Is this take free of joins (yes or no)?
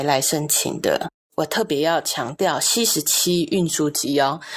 no